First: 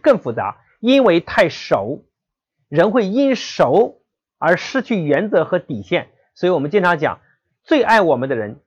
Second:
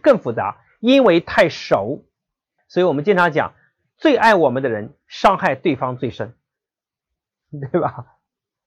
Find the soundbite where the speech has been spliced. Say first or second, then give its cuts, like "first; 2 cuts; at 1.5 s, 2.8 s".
second; 1 cut; at 2.6 s